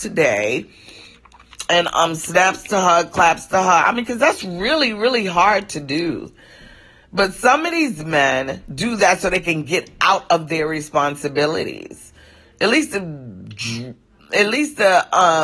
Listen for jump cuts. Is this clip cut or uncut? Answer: uncut